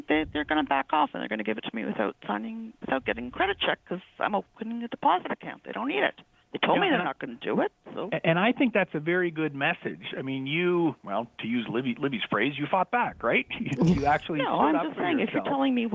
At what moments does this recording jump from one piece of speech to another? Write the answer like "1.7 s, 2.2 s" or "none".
none